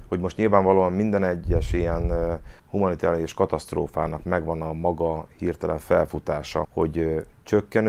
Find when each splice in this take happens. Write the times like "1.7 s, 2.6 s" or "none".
2.6 s, 6.6 s